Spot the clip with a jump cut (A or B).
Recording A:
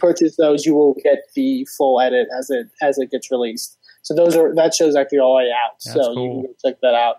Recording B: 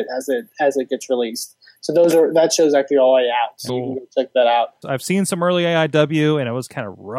B